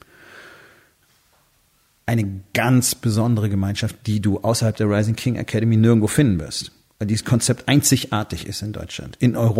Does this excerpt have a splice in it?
no; 0 cuts

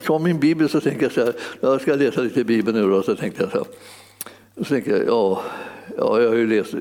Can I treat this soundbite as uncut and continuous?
yes; 0 cuts

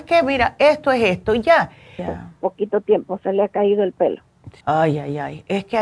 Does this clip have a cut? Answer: yes; 2 cuts; at 2.0 s, 4.6 s

